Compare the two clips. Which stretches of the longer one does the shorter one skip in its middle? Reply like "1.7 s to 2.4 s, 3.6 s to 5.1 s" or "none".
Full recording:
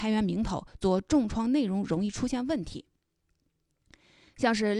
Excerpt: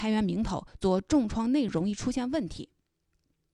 1.7 s to 1.8 s